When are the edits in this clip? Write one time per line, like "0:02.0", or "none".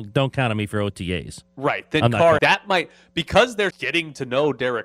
0:02.4
0:03.7